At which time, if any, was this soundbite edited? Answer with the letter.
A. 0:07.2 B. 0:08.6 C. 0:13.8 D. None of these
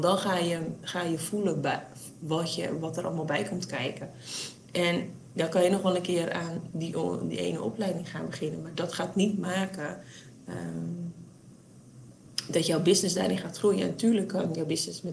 D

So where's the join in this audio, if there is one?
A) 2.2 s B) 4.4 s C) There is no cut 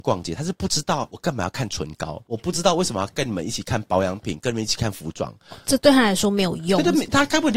C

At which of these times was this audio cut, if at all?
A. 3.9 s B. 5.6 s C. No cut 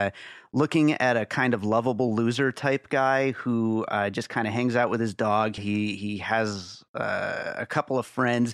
B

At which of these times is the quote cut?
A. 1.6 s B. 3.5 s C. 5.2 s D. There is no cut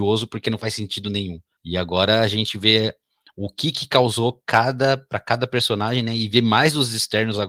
A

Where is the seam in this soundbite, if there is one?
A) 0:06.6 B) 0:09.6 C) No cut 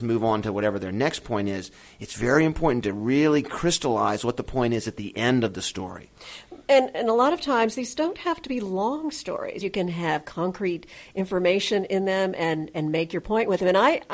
B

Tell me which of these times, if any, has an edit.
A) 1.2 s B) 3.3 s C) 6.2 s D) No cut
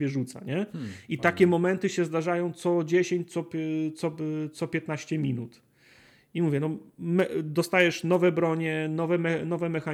D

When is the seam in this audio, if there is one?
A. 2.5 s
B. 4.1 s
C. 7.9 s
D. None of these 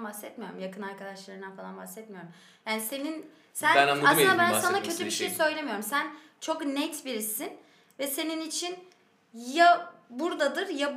D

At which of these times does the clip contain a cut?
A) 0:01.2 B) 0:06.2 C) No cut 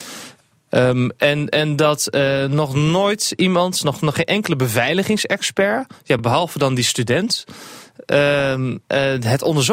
C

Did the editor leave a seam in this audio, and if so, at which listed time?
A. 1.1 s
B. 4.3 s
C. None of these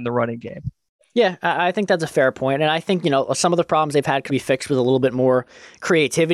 B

